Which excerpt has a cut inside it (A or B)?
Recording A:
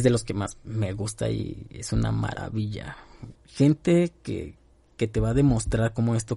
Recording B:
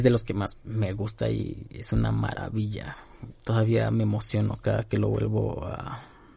A